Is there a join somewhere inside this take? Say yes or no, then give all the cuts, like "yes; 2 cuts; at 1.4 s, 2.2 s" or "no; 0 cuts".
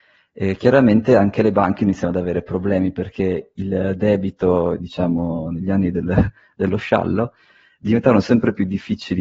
yes; 1 cut; at 4.8 s